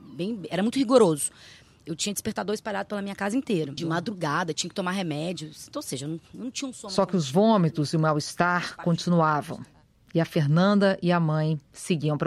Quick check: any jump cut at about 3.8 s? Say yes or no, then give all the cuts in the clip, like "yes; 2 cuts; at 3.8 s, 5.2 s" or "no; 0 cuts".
yes; 1 cut; at 3.8 s